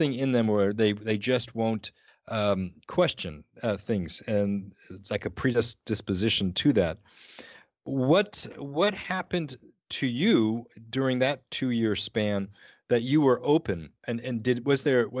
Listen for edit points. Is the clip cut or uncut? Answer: uncut